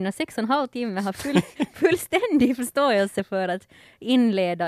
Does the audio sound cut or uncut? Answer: uncut